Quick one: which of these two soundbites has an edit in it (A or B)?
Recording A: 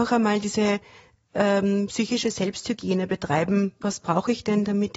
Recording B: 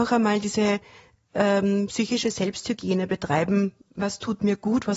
A